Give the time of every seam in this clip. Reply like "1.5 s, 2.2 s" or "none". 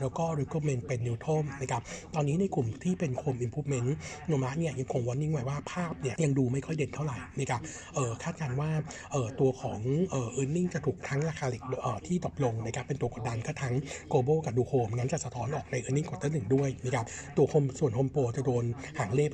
6.2 s